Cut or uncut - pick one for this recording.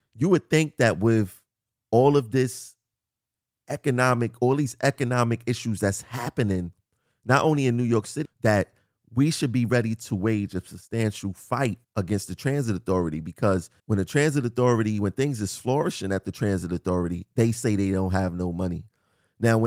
cut